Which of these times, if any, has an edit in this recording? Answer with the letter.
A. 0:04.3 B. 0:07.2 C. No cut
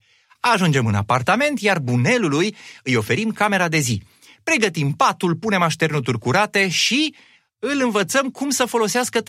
C